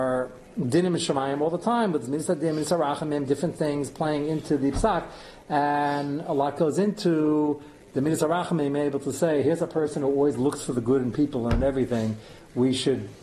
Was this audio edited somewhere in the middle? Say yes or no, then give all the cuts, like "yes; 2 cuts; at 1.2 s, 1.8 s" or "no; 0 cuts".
no; 0 cuts